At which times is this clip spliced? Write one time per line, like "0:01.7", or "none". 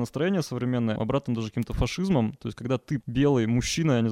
0:01.0
0:03.0